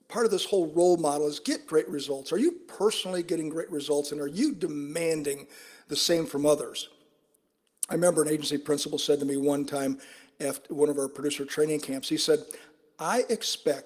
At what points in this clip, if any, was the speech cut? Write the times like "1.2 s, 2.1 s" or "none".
none